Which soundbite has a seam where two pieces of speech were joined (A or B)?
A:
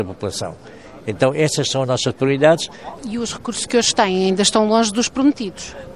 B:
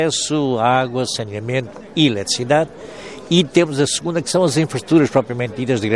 A